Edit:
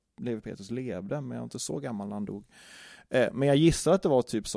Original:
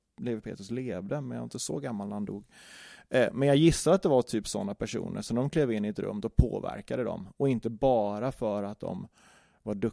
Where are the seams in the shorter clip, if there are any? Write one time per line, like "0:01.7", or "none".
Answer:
none